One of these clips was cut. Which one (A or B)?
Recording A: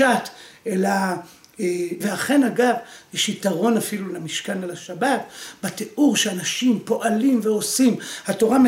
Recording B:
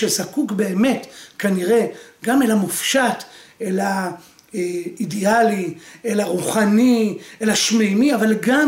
A